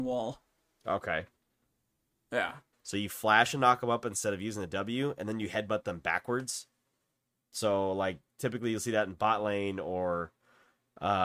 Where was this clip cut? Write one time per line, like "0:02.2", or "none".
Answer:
0:02.7